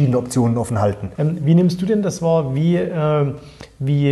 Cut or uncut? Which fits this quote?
cut